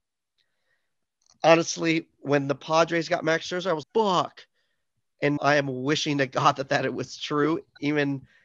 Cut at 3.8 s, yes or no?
yes